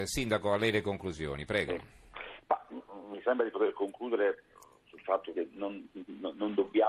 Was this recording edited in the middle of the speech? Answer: no; 0 cuts

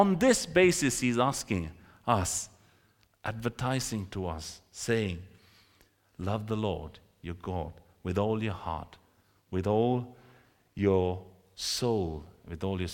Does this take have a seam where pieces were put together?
yes; 1 cut; at 3.1 s

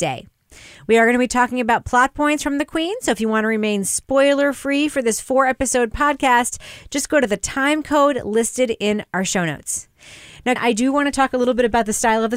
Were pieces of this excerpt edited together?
yes; 1 cut; at 10.6 s

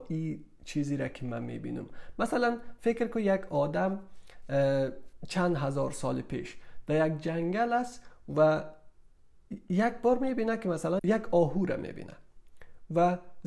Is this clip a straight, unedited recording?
no; 1 cut; at 11.0 s

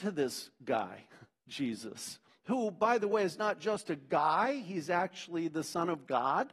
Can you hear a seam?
no; 0 cuts

